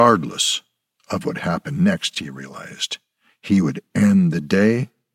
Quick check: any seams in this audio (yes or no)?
no